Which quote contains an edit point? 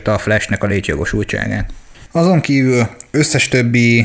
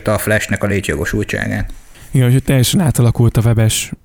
first; 1 cut; at 2.1 s

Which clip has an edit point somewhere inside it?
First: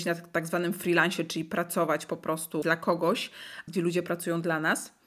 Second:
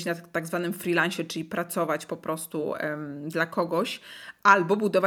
first; 2 cuts; at 2.6 s, 3.7 s

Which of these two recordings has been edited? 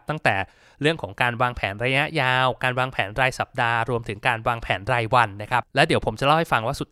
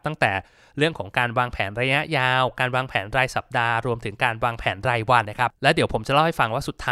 second; 1 cut; at 5.2 s

